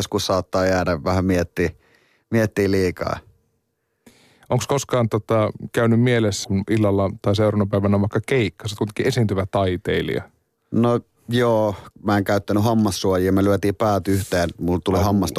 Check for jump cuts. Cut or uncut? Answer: cut